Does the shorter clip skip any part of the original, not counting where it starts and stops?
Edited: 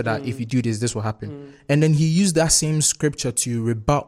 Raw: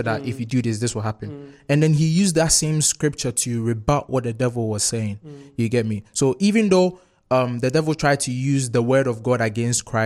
no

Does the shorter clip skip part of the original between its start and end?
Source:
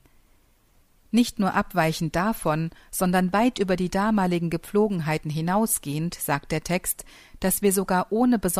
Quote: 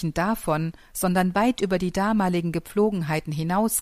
no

